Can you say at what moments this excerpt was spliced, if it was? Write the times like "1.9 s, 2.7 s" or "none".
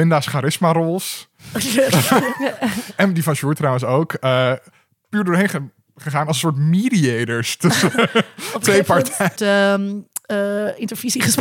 9.4 s